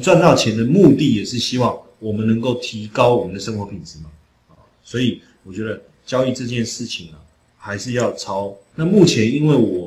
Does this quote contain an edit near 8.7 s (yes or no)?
yes